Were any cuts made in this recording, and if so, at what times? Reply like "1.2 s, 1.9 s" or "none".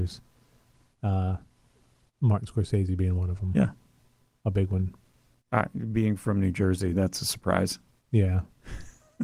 none